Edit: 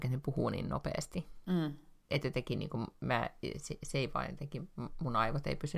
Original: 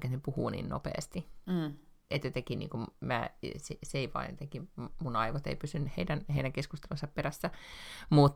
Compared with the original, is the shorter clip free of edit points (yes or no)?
yes